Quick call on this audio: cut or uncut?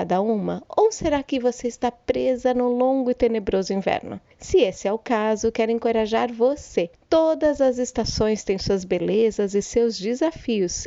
uncut